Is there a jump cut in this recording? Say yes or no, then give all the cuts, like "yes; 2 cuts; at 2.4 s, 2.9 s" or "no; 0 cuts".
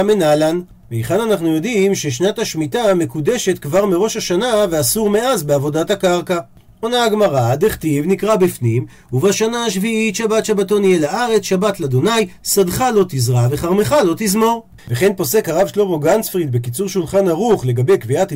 yes; 1 cut; at 14.8 s